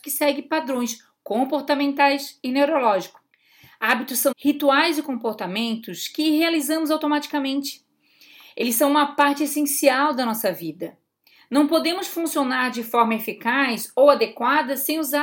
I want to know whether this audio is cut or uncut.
cut